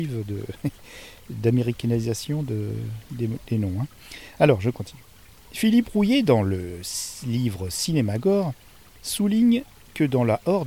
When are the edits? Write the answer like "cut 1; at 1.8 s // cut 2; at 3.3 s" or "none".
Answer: none